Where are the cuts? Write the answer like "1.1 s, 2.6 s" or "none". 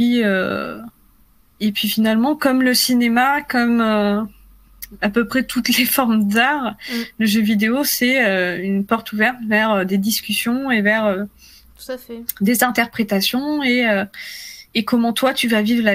none